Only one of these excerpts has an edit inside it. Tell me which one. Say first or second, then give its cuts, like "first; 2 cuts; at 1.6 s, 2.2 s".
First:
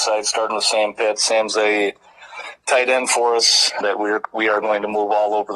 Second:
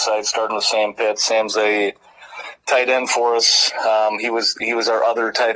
first; 1 cut; at 3.8 s